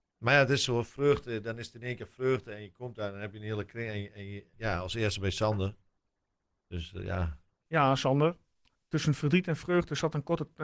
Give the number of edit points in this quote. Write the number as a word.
one